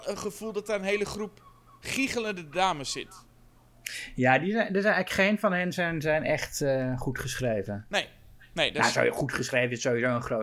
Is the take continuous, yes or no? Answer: yes